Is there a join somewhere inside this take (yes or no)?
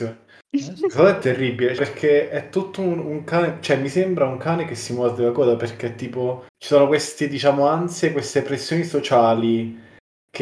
yes